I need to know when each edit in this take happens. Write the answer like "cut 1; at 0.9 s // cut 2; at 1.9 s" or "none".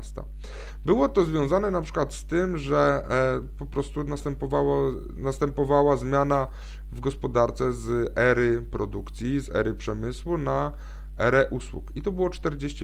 none